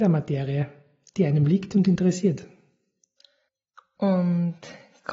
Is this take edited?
no; 0 cuts

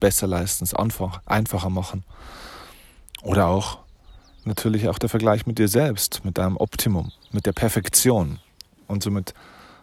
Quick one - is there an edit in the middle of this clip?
no; 0 cuts

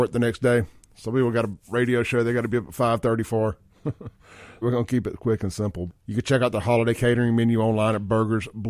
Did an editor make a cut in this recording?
yes; 2 cuts; at 4.6 s, 5.9 s

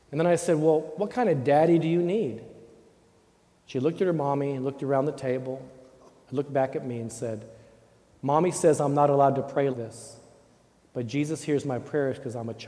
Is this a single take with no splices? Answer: no; 1 cut; at 9.7 s

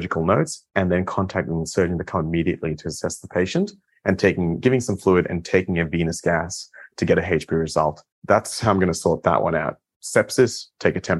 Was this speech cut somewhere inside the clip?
yes; 1 cut; at 8.1 s

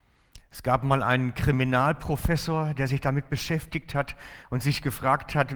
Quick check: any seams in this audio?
no; 0 cuts

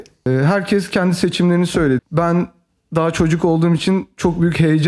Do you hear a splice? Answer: yes; 1 cut; at 2.0 s

